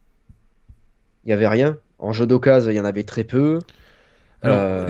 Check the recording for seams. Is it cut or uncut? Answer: uncut